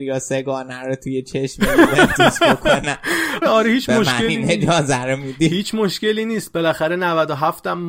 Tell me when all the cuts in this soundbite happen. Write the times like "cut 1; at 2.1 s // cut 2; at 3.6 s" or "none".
cut 1; at 3.4 s